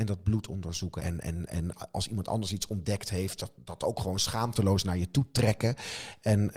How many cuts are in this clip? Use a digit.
1